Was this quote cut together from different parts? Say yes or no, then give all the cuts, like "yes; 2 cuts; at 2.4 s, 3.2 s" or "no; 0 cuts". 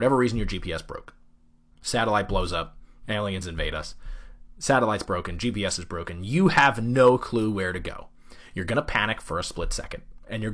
no; 0 cuts